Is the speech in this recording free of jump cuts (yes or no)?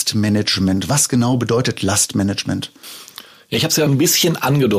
no